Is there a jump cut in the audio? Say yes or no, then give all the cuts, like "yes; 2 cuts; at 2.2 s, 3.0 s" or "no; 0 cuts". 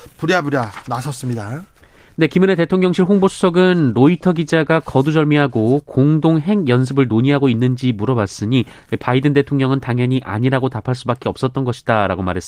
no; 0 cuts